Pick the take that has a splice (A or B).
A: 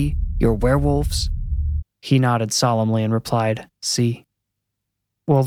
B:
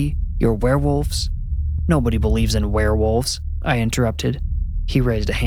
A